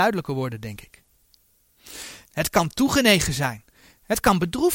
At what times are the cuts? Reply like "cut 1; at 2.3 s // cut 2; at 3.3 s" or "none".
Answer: cut 1; at 2.2 s